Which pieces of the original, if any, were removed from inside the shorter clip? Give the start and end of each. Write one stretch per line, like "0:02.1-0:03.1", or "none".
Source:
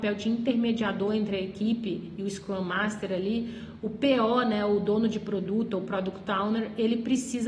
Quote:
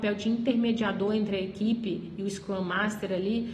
none